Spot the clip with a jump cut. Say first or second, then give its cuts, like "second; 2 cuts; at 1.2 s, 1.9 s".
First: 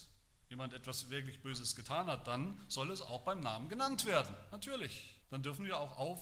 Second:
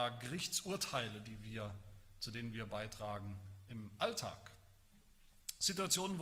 first; 1 cut; at 5.2 s